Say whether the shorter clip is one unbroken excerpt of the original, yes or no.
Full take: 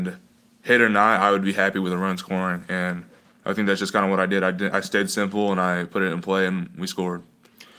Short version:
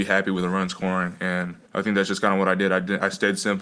no